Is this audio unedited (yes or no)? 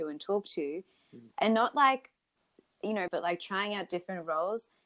no